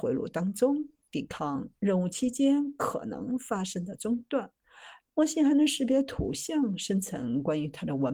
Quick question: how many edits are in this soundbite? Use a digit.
1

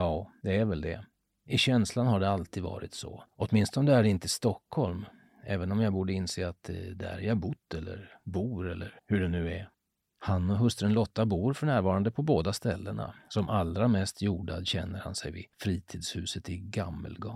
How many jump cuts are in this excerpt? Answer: 1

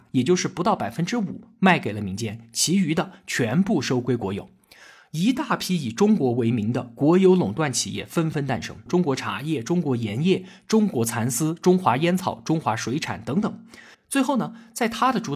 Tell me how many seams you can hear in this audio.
2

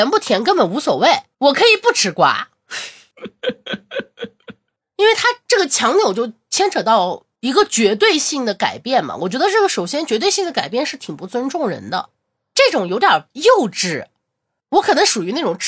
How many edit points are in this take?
1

